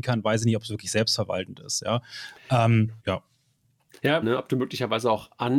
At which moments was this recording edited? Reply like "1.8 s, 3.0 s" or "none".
3.0 s, 4.2 s

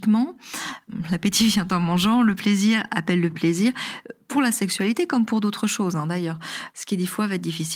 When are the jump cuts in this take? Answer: 6.7 s

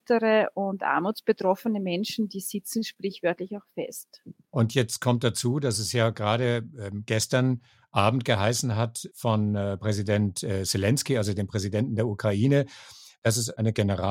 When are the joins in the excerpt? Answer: none

